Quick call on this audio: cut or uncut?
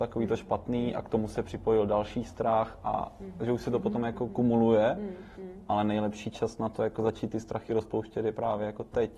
uncut